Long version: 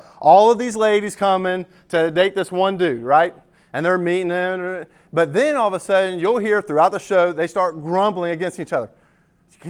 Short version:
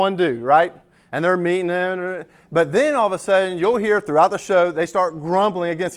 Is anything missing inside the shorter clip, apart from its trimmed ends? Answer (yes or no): no